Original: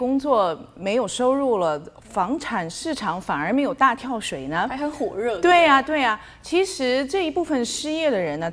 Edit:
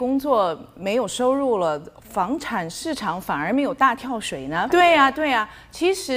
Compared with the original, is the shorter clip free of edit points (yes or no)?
no